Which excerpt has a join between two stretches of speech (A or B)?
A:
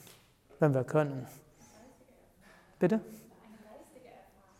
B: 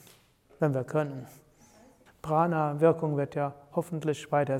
B